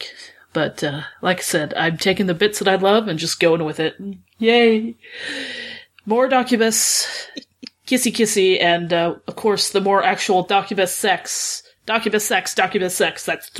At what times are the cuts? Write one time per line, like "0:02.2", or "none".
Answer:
none